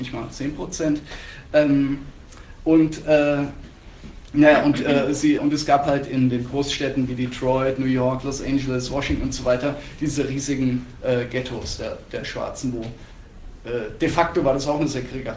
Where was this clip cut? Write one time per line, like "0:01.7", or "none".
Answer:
0:05.4